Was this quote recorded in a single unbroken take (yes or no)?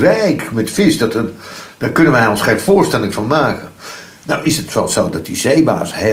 yes